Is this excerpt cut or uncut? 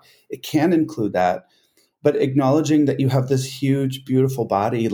uncut